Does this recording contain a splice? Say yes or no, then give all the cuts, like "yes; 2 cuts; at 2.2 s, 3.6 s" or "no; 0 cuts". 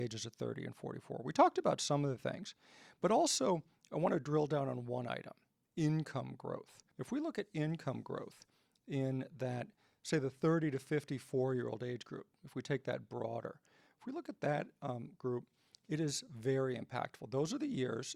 yes; 1 cut; at 6.9 s